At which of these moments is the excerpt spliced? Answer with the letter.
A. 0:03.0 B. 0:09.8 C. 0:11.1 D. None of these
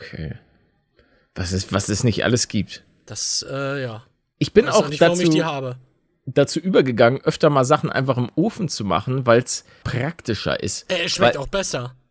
B